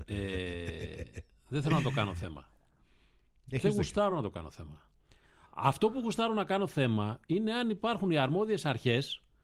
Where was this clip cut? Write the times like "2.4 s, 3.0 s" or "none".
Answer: none